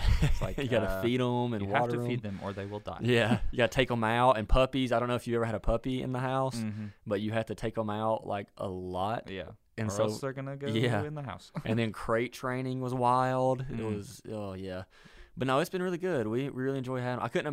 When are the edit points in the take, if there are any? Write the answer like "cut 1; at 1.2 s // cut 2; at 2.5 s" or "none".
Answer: none